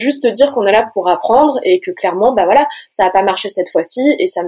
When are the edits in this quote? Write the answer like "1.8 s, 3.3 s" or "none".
none